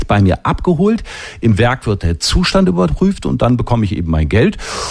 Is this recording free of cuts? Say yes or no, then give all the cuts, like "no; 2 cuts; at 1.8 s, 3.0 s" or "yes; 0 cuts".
yes; 0 cuts